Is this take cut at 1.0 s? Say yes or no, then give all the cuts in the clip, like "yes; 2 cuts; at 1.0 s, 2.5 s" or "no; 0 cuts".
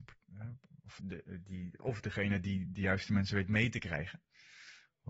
yes; 1 cut; at 1.0 s